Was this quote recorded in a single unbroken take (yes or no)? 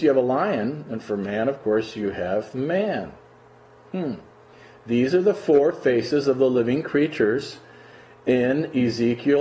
yes